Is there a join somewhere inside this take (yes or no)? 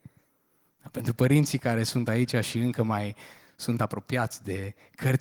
no